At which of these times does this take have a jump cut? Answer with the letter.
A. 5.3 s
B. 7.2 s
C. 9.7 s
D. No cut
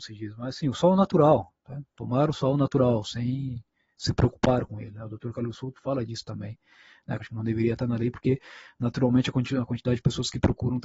B